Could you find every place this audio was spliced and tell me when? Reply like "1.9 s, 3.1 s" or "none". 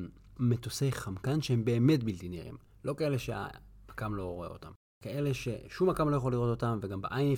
none

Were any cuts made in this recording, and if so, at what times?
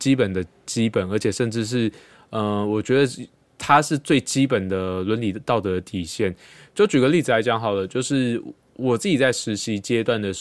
none

